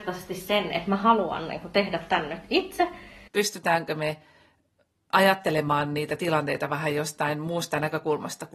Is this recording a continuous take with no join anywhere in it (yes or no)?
no